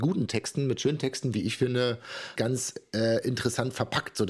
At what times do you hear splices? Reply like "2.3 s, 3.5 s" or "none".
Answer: 2.4 s